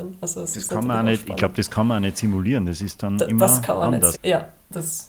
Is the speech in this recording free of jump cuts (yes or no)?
no